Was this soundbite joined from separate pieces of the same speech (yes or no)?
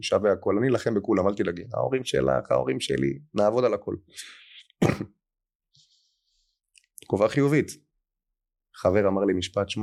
yes